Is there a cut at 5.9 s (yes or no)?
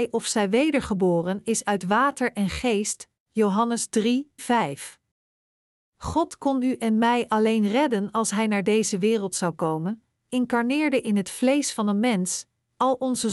no